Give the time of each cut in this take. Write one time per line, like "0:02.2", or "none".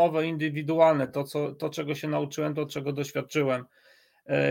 none

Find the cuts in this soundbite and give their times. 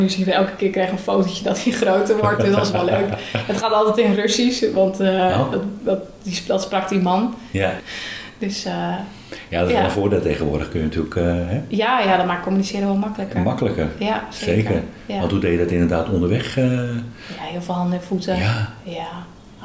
0:07.8

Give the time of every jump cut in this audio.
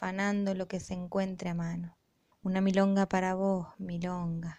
0:02.3

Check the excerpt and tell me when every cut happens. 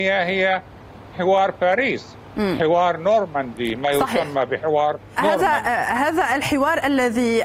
0:01.1
0:05.2

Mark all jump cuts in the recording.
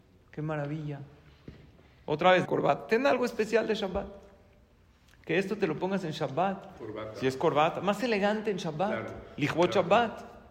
0:02.4

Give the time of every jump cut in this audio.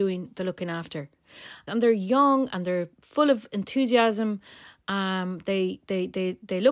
0:01.7

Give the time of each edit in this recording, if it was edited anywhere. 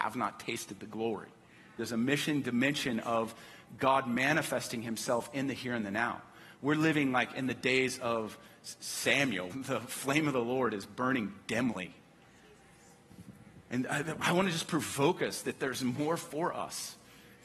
0:01.8
0:09.5

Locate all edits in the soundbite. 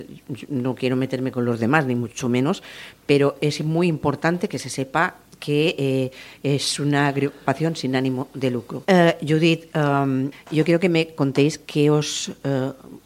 0:08.8
0:10.3

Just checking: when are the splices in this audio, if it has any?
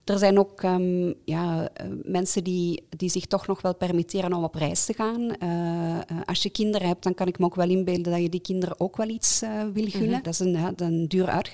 0:10.2

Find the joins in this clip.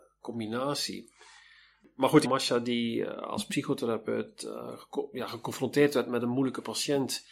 0:02.3

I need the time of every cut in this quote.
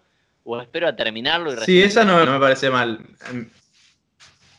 0:02.2

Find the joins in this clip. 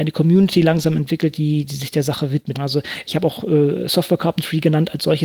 0:02.5

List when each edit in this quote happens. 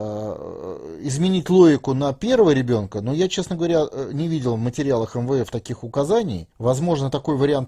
0:06.5

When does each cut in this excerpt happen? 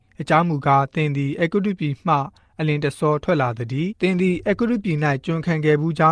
0:03.9

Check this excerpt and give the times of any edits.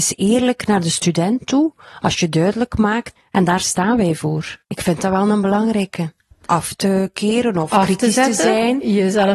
0:03.2
0:04.6
0:06.3

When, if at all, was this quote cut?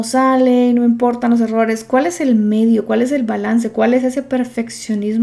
none

